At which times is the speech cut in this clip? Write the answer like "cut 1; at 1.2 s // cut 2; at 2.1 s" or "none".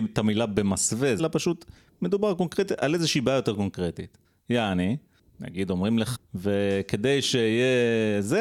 cut 1; at 1.2 s // cut 2; at 6.1 s